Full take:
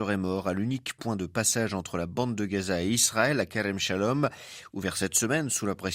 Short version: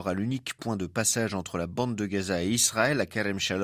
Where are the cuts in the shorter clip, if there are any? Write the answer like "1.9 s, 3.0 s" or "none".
none